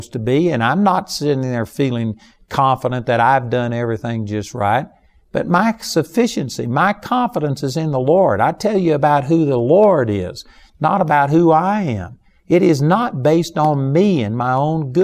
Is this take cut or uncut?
uncut